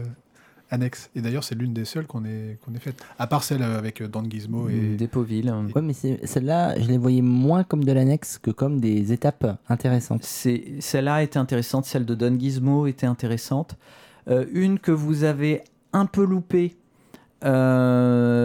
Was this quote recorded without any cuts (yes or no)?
no